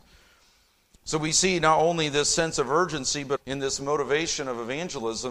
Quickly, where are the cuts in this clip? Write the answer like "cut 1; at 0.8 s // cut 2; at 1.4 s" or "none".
cut 1; at 3.4 s